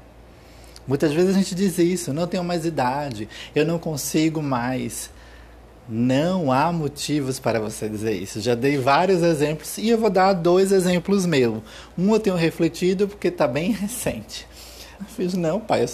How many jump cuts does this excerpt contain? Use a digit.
1